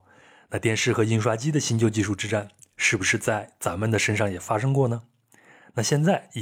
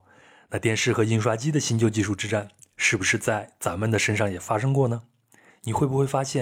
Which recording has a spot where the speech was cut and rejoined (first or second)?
second